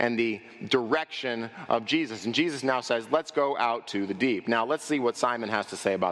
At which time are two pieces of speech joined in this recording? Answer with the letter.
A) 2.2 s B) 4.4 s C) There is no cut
C